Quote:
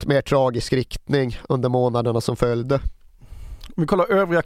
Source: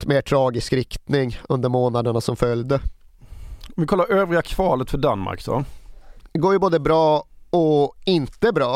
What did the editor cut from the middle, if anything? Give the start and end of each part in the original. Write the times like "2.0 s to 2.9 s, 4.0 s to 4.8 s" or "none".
none